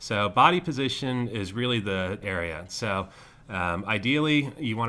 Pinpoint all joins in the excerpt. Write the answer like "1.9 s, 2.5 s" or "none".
2.2 s